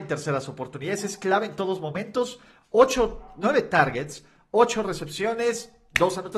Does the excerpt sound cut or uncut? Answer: uncut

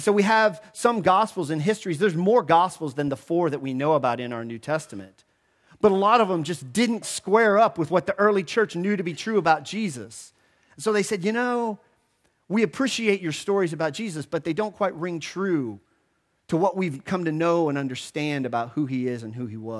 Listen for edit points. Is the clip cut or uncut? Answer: cut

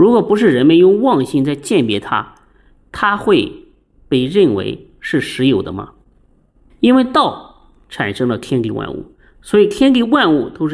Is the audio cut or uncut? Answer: cut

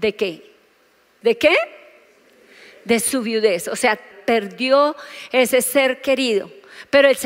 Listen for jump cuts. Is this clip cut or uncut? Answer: cut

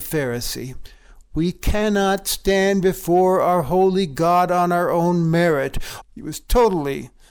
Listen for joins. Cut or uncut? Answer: cut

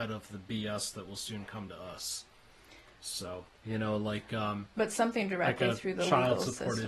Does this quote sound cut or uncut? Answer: cut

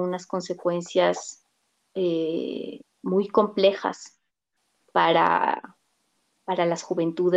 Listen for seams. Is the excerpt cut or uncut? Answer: uncut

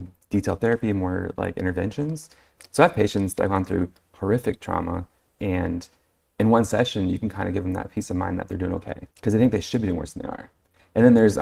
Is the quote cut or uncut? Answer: cut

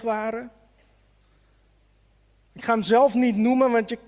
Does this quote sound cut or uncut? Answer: cut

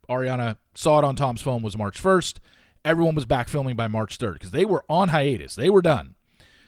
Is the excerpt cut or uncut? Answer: uncut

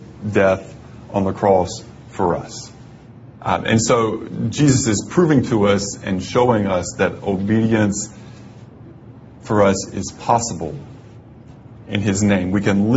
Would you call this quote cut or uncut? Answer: cut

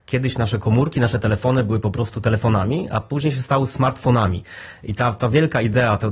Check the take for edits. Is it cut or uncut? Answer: uncut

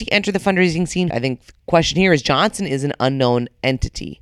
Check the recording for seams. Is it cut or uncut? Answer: cut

